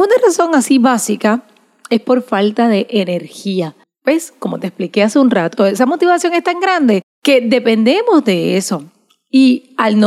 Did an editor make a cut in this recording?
yes; 1 cut; at 5.6 s

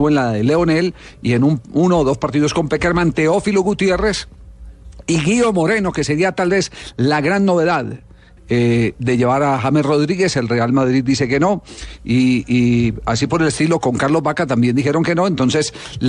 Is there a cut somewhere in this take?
yes; 1 cut; at 8.4 s

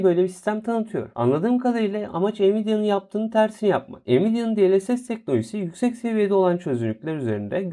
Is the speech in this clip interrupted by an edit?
no; 0 cuts

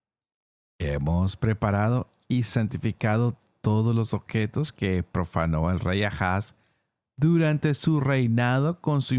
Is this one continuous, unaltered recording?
yes; 0 cuts

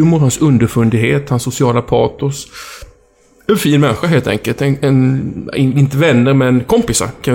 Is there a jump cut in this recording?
no; 0 cuts

